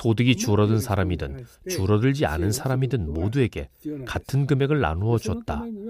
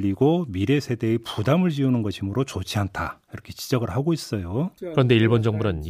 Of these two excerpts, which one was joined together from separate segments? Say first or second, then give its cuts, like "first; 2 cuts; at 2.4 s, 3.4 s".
second; 1 cut; at 4.8 s